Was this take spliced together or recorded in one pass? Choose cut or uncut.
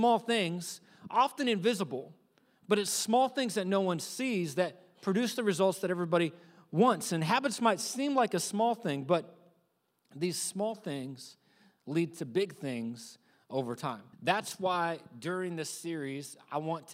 cut